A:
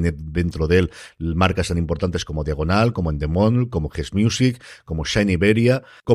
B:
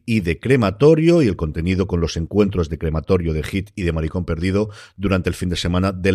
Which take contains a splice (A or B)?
A